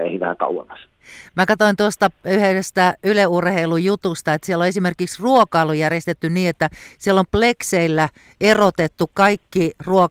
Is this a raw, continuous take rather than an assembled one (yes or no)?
yes